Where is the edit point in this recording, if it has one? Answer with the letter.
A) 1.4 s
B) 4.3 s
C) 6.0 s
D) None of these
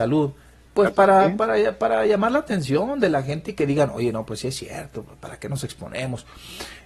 D